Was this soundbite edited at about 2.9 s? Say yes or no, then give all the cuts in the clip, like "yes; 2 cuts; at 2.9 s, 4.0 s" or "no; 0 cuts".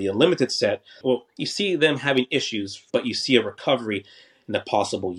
yes; 2 cuts; at 1.0 s, 2.9 s